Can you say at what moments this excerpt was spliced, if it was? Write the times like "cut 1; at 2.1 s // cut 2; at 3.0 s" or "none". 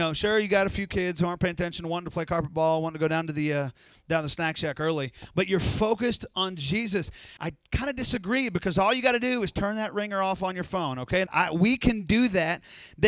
cut 1; at 7.4 s // cut 2; at 11.3 s